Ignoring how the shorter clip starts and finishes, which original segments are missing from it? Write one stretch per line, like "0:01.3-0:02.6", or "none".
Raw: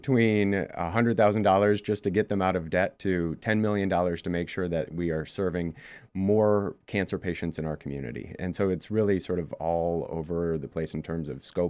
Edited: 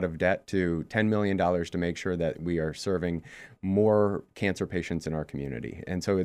none

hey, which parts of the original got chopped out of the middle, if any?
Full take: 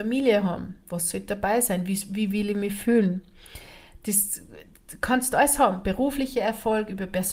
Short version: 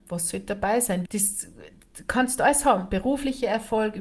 0:01.9-0:04.0

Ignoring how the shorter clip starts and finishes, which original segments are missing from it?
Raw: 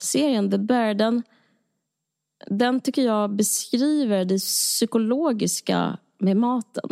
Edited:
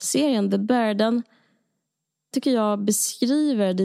0:02.3-0:02.8

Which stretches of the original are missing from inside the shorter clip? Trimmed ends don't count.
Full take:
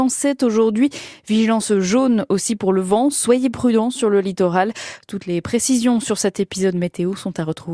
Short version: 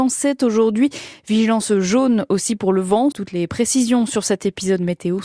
0:03.1-0:05.1

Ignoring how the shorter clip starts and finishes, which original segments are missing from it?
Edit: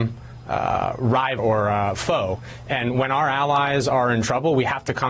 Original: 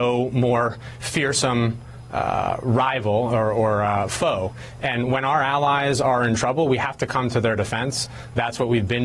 0:03.0-0:03.5

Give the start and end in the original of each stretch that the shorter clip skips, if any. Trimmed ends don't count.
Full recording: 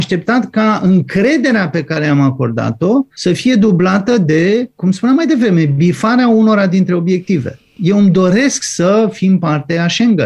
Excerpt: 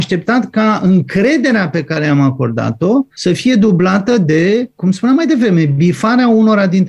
none

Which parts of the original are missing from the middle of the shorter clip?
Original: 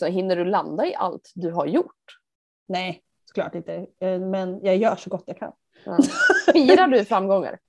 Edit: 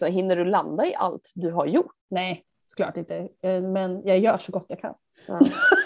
0:02.0-0:02.6

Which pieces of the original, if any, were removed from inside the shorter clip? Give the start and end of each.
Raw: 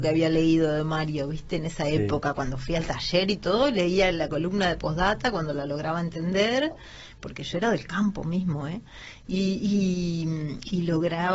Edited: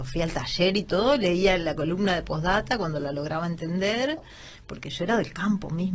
none

